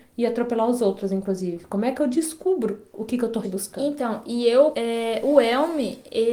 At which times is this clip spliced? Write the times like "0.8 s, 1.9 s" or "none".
3.4 s, 4.7 s